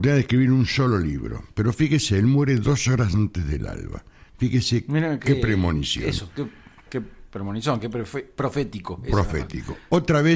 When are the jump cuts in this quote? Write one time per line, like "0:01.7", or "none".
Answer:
none

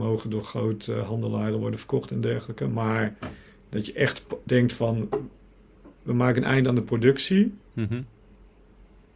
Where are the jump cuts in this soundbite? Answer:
0:04.5

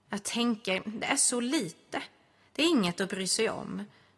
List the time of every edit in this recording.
none

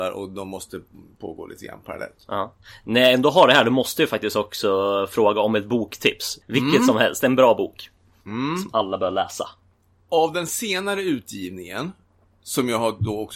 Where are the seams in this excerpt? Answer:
0:06.4

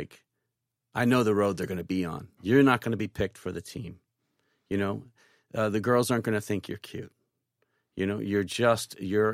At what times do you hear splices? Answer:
0:02.4

